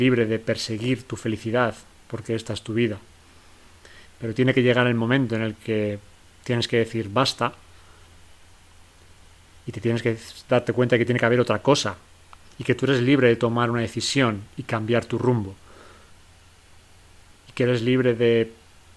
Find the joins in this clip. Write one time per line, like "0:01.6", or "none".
0:04.1
0:12.4